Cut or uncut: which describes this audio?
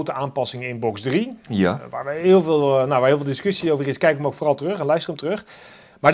uncut